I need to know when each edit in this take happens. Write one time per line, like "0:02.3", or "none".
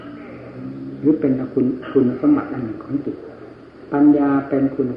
none